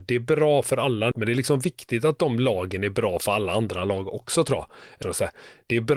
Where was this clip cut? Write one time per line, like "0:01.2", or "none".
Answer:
0:01.1
0:05.0